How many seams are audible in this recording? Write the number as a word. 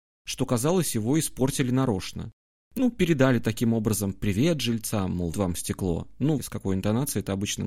two